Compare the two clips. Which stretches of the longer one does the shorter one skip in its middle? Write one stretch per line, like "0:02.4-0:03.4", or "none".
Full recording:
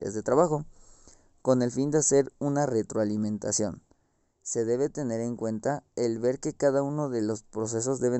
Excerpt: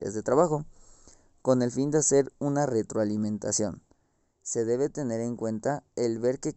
none